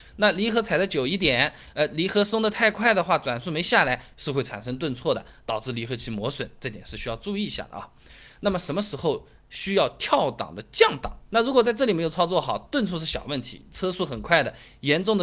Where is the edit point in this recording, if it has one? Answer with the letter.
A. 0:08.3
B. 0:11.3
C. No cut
B